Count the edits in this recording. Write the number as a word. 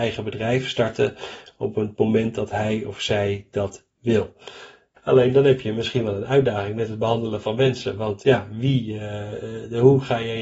one